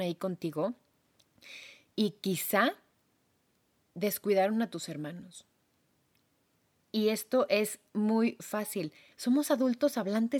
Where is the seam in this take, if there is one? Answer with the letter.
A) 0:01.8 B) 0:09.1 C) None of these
B